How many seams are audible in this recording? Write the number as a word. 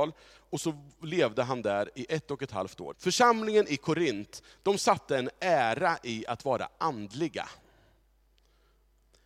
one